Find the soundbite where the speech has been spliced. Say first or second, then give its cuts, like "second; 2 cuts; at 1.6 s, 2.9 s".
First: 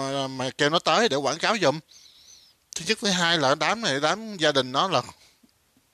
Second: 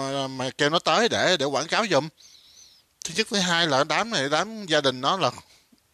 first; 1 cut; at 1.1 s